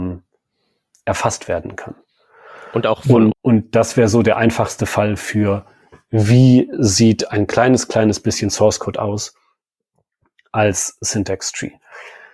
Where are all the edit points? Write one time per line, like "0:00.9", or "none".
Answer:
0:03.3

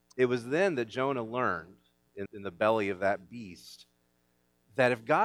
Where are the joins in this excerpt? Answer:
0:02.3

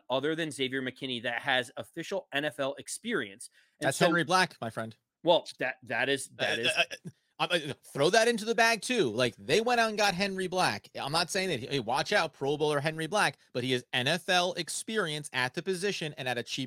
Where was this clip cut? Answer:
none

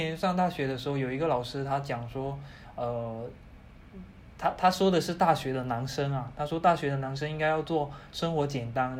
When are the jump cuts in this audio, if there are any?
none

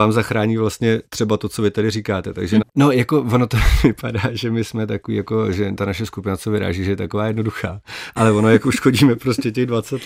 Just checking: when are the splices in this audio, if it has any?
0:02.6

